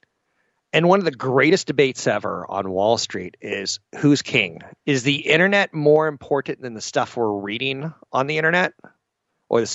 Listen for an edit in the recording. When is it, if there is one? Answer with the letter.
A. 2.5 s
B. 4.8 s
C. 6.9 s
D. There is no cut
B